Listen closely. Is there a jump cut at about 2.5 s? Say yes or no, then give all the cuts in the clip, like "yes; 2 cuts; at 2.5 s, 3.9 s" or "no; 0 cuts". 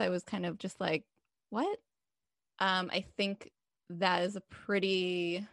yes; 1 cut; at 2.5 s